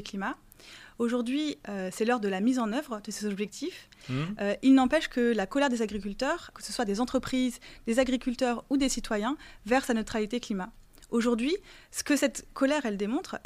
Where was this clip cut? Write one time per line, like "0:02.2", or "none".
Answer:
0:04.0
0:06.5